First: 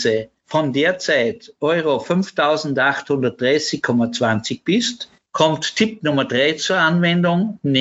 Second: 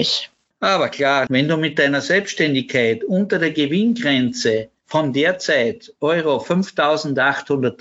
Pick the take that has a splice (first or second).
second